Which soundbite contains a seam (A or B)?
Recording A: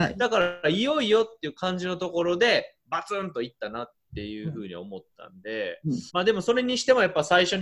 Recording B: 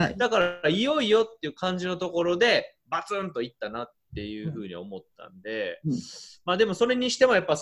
A